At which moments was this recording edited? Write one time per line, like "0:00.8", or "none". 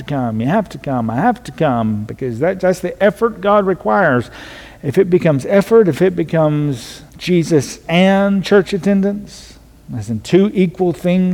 0:02.6
0:07.1